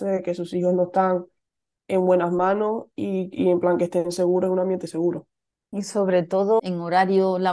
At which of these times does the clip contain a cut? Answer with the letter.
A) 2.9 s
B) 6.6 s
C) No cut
B